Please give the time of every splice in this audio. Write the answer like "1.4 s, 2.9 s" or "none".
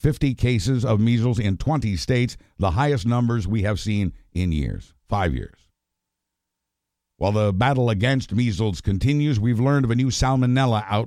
5.0 s